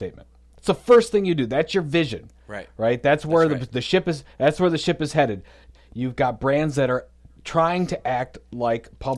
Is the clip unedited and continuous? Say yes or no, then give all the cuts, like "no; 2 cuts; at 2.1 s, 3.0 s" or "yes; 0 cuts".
no; 1 cut; at 5.8 s